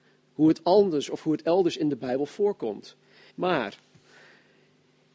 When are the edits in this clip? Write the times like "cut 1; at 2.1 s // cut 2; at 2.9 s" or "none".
cut 1; at 3.3 s